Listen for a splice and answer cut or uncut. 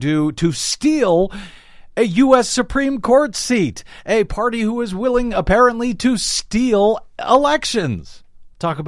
uncut